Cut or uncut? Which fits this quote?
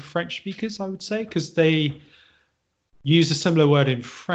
uncut